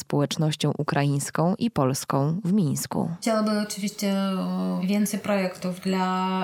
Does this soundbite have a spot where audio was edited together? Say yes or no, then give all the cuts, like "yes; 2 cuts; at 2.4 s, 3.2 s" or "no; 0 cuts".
no; 0 cuts